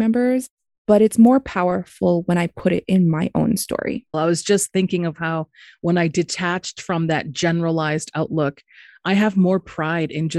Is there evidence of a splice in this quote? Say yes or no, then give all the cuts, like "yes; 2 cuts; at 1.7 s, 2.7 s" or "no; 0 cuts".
yes; 1 cut; at 4.1 s